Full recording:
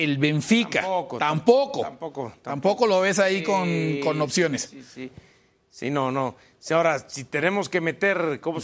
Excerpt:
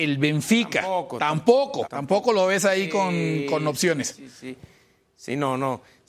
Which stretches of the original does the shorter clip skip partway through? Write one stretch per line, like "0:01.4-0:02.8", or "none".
0:01.8-0:02.4